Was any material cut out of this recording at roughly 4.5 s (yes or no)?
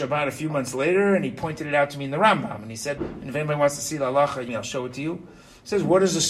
yes